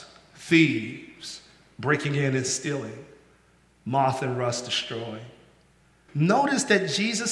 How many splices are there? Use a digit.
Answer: 1